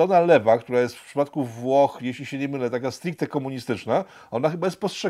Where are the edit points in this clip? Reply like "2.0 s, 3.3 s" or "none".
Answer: none